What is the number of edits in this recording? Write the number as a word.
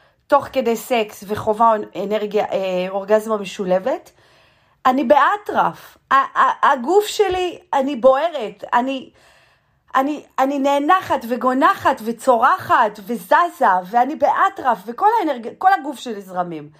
zero